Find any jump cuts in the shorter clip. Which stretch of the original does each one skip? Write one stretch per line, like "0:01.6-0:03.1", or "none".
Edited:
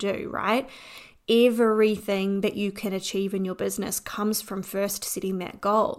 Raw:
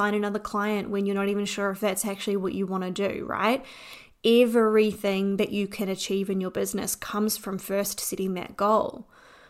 none